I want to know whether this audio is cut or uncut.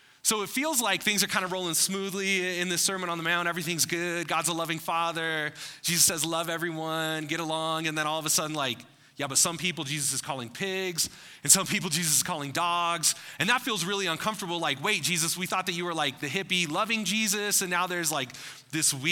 uncut